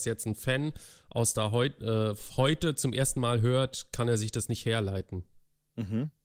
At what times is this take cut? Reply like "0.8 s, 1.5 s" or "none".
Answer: none